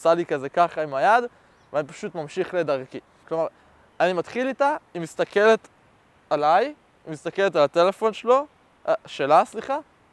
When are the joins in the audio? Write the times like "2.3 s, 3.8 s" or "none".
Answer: 3.2 s